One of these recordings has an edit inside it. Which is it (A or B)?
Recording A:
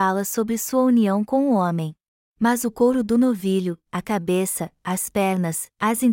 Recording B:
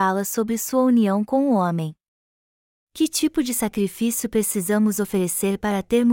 A